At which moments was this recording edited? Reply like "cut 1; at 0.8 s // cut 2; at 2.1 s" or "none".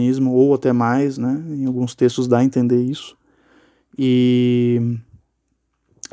none